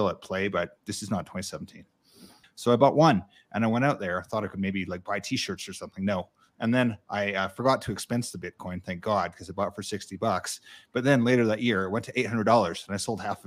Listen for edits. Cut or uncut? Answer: cut